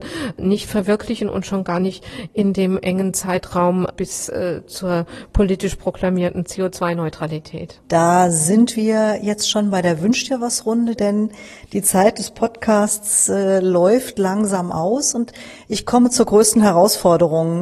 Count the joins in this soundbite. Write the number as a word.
two